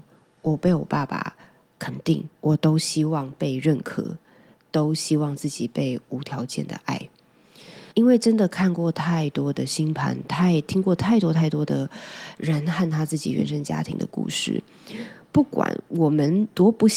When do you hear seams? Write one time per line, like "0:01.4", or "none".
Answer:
0:07.9